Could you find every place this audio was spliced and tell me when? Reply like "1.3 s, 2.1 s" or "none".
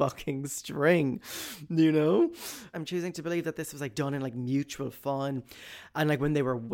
2.7 s